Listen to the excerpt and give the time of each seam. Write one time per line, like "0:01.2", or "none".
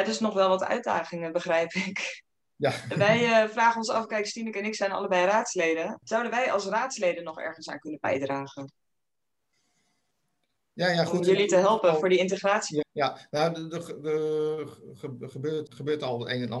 0:06.0
0:12.8
0:15.7